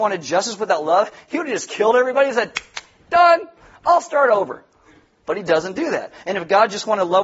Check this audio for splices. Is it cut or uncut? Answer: uncut